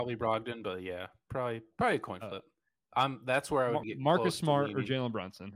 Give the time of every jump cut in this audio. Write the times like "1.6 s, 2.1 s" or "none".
3.8 s